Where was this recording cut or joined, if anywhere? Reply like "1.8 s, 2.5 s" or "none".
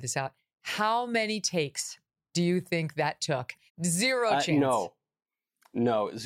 3.7 s